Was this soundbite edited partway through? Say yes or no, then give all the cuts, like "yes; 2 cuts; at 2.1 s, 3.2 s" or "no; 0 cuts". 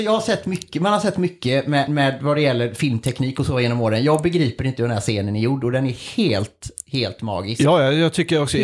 no; 0 cuts